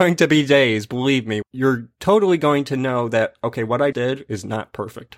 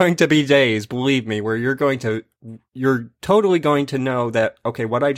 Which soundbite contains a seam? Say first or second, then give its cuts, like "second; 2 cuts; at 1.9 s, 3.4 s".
first; 2 cuts; at 1.4 s, 3.9 s